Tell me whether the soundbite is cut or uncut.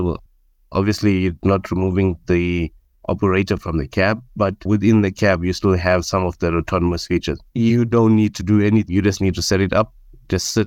cut